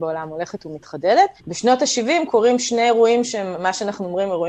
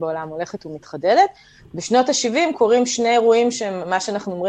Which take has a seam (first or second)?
first